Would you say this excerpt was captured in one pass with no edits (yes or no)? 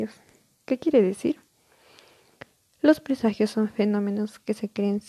yes